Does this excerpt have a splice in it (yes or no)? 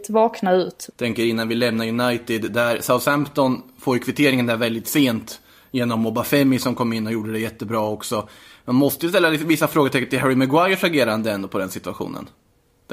yes